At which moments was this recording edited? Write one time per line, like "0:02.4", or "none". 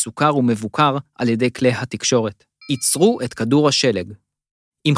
0:02.6